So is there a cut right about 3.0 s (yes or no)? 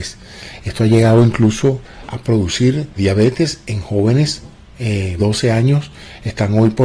yes